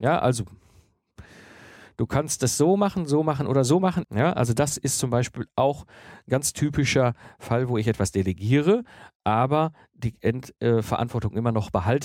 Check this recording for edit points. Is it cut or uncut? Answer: cut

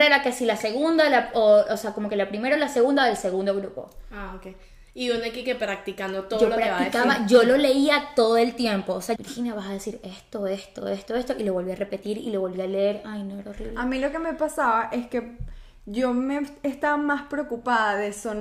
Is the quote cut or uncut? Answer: cut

